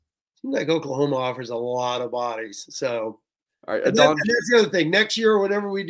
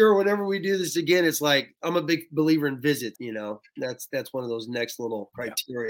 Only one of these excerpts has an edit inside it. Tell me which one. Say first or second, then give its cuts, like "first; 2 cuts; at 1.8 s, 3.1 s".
second; 1 cut; at 3.1 s